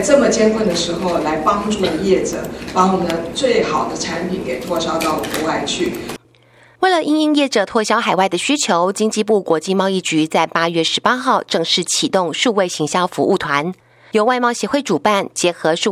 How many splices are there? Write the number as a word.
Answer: zero